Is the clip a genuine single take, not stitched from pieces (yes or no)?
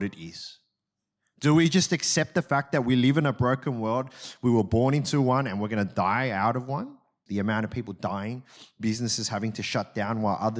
no